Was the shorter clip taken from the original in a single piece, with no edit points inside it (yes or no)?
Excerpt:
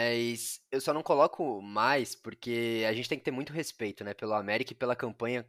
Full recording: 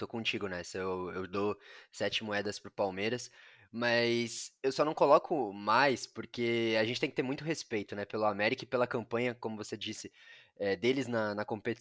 yes